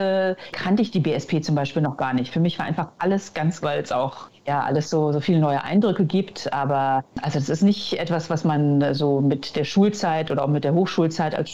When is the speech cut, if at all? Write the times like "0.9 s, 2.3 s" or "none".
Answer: 3.6 s